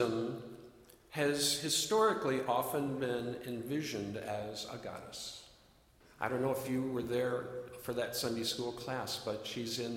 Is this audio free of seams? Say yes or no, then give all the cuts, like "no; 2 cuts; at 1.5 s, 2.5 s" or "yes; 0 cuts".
no; 1 cut; at 6.0 s